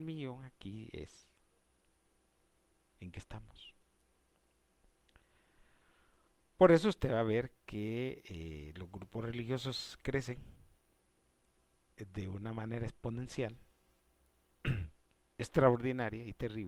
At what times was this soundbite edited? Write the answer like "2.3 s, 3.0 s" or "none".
none